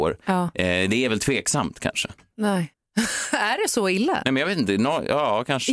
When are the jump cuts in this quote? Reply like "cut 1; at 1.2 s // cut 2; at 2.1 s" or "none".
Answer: cut 1; at 2.7 s